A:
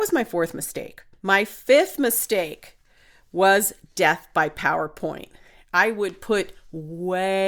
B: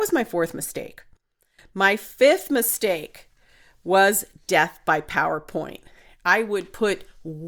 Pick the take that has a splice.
A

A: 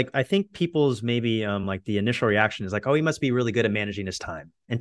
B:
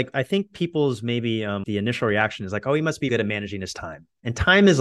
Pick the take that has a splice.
B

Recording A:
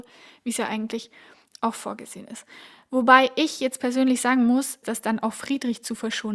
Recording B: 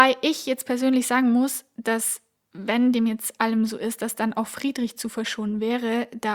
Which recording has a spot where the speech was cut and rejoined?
A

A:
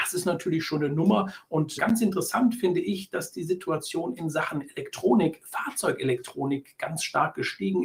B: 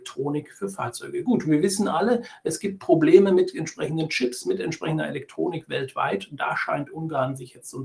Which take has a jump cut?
A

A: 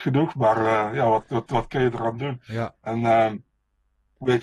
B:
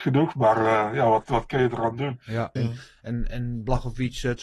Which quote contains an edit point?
B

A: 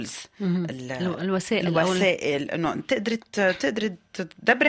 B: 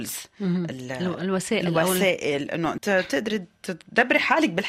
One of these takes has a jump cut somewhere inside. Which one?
B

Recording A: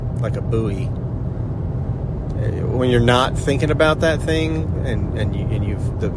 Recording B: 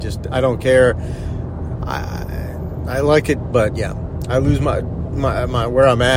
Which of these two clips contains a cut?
B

